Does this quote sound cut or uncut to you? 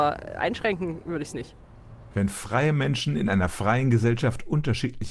uncut